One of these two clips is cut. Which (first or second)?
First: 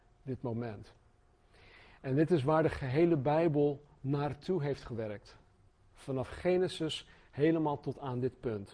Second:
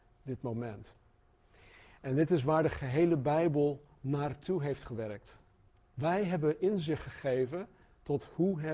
second